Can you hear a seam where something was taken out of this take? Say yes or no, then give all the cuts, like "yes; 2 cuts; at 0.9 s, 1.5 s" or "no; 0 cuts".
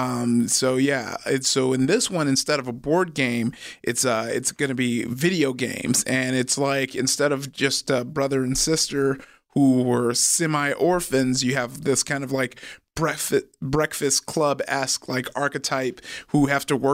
no; 0 cuts